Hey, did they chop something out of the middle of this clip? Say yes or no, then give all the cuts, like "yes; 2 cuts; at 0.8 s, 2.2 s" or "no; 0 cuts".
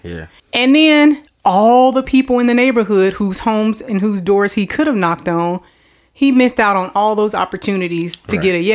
no; 0 cuts